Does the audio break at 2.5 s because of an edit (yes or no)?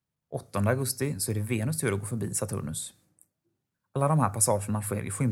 no